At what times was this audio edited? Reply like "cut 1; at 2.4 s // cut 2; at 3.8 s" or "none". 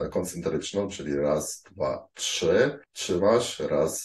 cut 1; at 2.8 s

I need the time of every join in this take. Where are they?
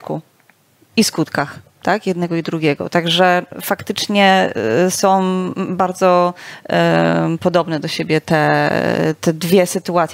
none

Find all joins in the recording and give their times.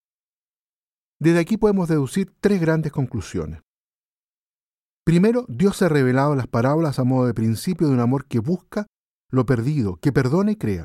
none

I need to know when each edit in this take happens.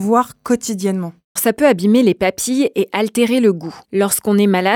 cut 1; at 1.4 s // cut 2; at 3.8 s

